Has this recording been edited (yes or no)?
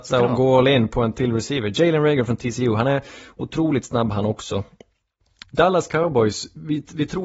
yes